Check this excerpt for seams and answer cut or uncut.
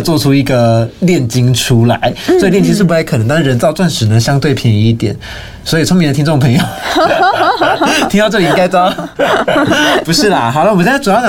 uncut